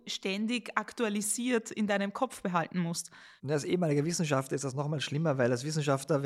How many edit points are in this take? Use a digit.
0